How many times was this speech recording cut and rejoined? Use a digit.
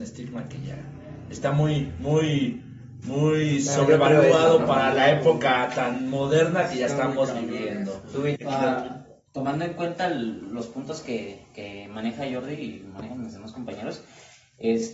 1